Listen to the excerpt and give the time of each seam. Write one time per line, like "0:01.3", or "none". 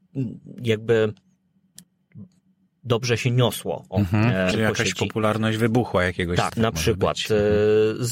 0:04.5
0:06.5